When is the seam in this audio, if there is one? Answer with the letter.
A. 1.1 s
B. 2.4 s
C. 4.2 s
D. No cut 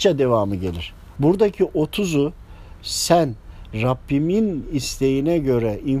A